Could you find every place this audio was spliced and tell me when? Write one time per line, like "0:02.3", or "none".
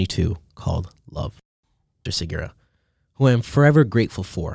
0:02.1